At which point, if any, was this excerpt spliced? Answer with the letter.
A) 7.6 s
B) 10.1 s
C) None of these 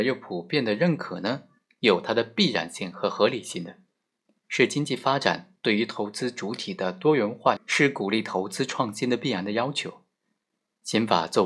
A